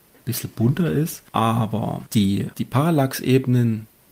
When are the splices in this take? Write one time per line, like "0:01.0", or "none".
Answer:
0:01.3